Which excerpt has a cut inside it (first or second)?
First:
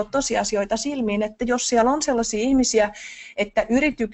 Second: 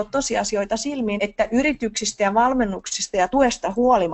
second